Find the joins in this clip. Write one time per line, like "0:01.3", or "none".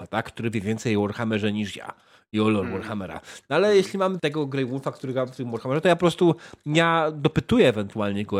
0:04.2

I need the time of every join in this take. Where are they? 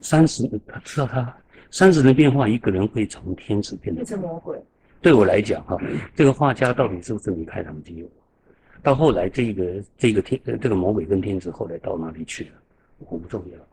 none

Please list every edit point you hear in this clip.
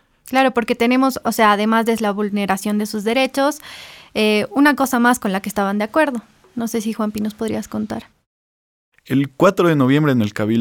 none

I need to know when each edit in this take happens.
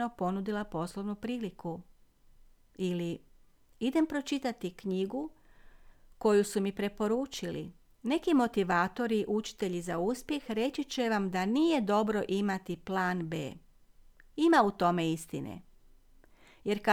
0:07.9

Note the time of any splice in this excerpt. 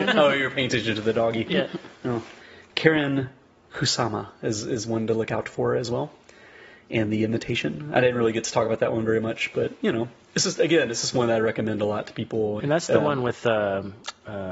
0:02.0
0:12.6

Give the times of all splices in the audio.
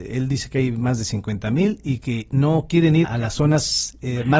0:03.0

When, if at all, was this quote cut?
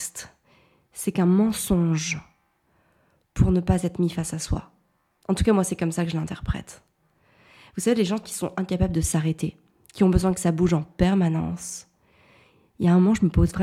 none

